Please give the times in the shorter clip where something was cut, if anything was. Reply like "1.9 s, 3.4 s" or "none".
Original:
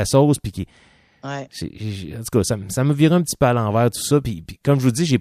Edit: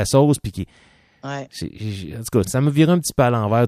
2.4 s